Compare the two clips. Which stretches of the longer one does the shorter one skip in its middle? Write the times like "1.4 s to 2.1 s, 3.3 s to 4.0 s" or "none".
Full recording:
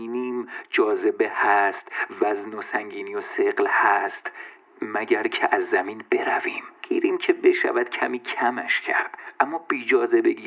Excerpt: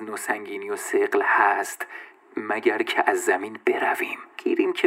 none